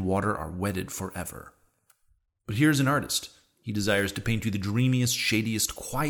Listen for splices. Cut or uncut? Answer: uncut